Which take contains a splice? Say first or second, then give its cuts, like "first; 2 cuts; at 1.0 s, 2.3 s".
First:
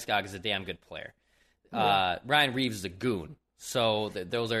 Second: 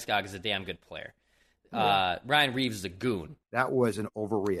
second; 1 cut; at 3.4 s